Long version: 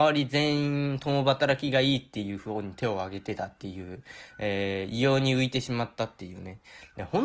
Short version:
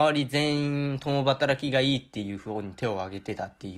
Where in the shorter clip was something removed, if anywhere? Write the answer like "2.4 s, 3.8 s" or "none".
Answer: none